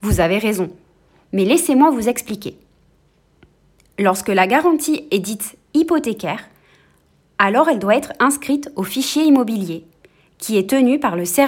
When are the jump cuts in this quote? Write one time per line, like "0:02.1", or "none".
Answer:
none